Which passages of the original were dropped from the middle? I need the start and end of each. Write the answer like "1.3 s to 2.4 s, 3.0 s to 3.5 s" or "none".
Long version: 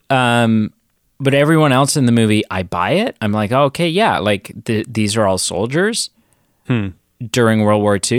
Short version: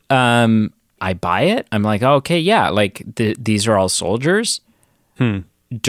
1.0 s to 2.5 s